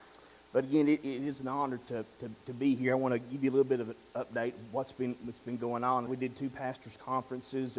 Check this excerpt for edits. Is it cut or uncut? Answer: cut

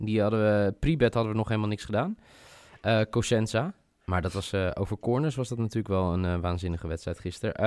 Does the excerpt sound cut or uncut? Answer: uncut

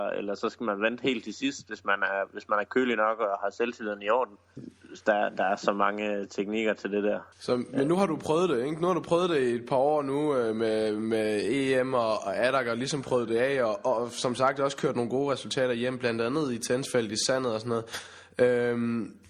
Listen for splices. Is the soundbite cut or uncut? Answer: cut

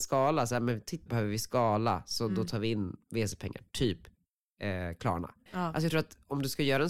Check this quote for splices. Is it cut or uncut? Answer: cut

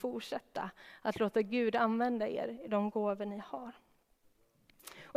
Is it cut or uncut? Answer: uncut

